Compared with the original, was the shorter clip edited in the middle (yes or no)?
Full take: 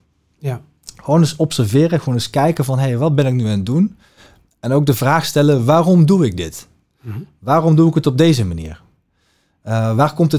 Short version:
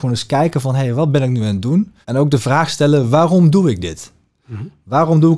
yes